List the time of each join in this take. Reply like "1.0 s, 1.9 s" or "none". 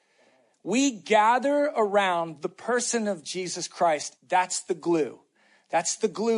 4.2 s